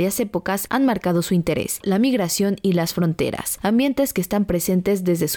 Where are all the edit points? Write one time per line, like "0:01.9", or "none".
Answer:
0:01.8